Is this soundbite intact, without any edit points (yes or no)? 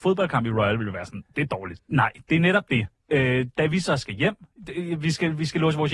no